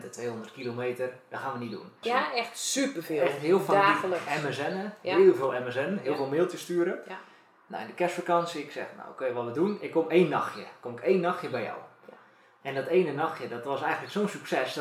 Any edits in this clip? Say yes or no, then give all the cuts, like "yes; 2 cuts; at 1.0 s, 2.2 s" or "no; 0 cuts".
yes; 1 cut; at 2.0 s